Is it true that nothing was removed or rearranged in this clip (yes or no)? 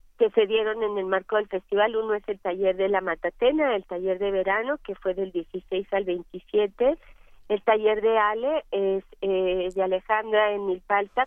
yes